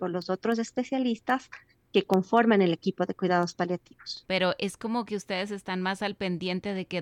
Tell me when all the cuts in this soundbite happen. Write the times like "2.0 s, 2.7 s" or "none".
4.3 s